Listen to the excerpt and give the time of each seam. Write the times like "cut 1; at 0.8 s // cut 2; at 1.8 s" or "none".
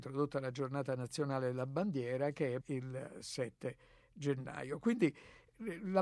cut 1; at 2.6 s